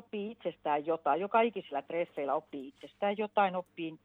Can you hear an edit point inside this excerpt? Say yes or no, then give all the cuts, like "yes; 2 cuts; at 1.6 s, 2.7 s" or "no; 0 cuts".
no; 0 cuts